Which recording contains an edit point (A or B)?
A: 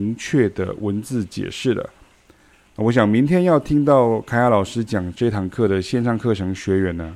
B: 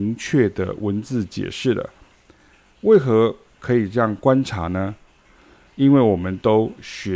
A